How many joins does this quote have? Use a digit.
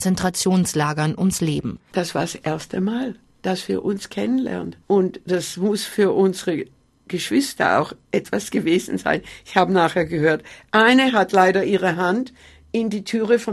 2